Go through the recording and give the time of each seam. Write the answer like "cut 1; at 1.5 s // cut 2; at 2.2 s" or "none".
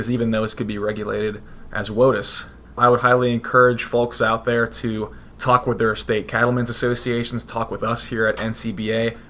none